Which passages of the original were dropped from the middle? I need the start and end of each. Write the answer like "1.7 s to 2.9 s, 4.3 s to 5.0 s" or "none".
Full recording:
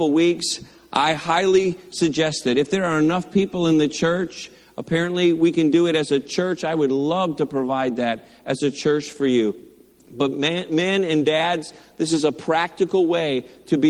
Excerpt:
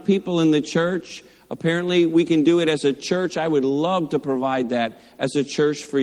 none

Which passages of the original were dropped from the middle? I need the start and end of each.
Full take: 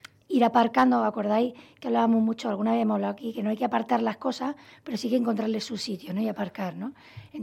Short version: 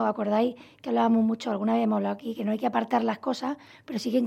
none

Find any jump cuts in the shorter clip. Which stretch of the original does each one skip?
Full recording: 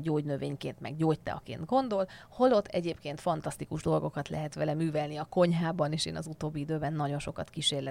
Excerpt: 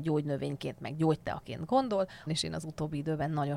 2.3 s to 5.9 s

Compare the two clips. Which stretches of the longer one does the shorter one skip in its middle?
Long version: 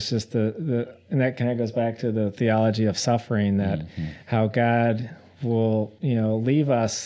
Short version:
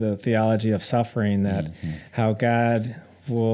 none

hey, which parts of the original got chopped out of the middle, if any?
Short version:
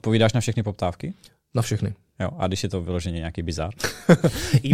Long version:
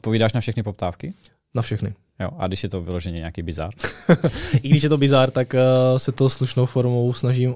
none

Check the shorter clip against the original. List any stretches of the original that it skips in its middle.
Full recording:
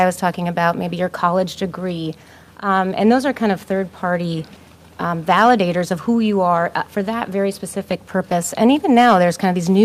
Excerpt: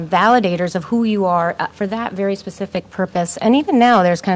none

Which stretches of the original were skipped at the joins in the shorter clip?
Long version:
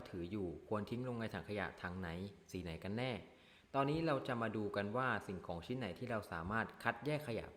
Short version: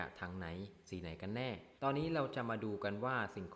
3.4 s to 3.7 s

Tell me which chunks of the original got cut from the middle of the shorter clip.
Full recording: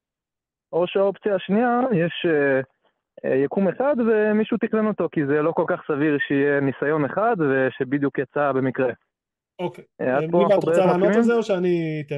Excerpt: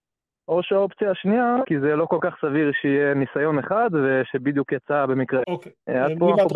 1.9 s to 5.1 s, 8.9 s to 9.6 s

